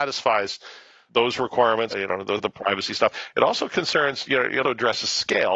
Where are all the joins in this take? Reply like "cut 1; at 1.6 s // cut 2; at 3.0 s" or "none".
cut 1; at 1.9 s // cut 2; at 4.6 s